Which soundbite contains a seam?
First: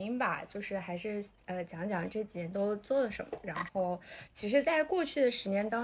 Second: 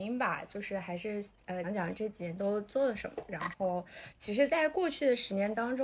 second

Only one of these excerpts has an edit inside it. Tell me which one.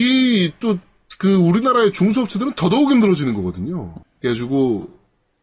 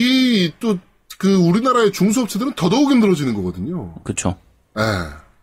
first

